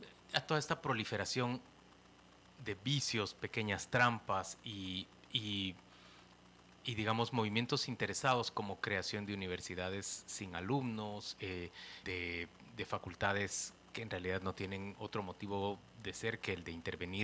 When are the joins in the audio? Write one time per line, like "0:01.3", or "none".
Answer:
0:12.0